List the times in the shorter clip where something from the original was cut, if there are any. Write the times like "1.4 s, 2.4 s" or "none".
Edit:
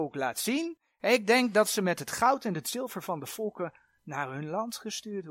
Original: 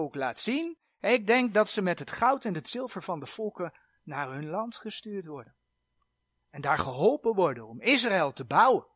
none